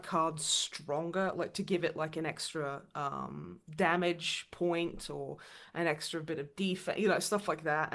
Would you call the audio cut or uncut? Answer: uncut